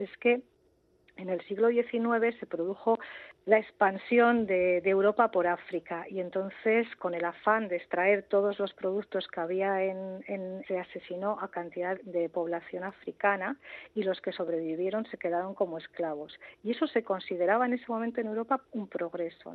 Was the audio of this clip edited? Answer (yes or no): yes